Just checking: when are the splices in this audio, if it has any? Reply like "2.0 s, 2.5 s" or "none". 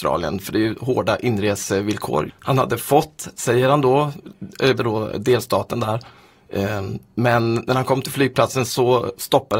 2.3 s, 4.8 s